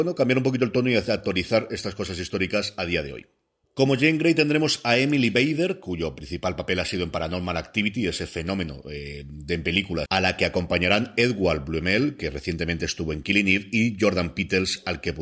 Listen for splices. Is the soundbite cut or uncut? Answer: cut